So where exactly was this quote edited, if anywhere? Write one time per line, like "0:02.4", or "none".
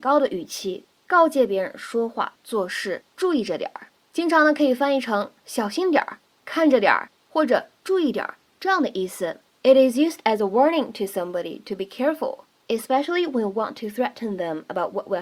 none